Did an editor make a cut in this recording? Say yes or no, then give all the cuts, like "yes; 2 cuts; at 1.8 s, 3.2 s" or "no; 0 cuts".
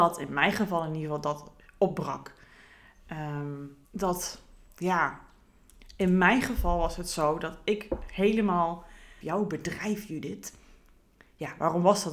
yes; 2 cuts; at 3.8 s, 9.2 s